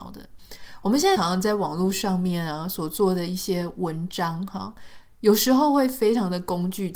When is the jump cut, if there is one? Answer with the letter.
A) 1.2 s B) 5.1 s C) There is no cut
A